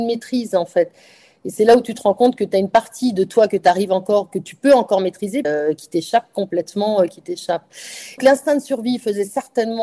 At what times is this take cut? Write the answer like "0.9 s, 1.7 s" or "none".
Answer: 5.4 s, 8.2 s